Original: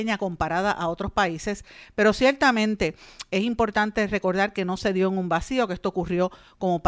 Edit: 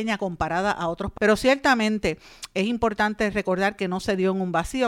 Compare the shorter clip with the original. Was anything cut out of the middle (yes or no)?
yes